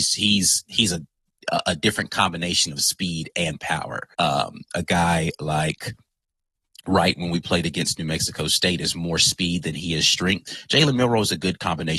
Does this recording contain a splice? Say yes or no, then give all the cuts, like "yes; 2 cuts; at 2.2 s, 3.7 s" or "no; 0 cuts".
yes; 1 cut; at 4.1 s